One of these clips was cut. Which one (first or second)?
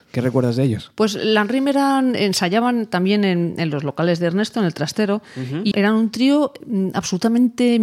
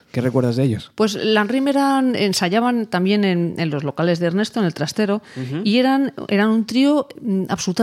first